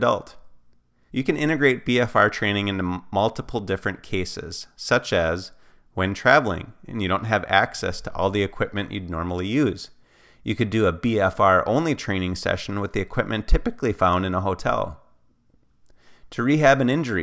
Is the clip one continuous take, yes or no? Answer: no